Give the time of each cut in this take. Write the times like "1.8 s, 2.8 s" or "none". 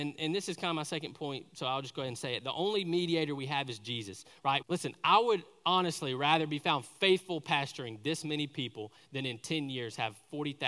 4.6 s